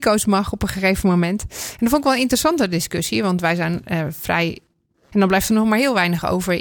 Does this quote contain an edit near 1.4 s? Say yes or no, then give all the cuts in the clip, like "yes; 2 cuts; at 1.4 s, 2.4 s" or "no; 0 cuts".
no; 1 cut; at 5.1 s